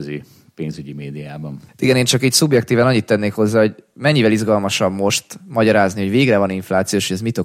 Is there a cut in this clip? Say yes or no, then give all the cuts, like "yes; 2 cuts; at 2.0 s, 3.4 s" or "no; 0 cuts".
yes; 1 cut; at 1.7 s